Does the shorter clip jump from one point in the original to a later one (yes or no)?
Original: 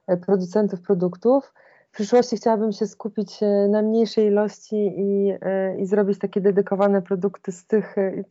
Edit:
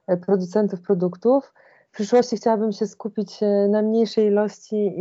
no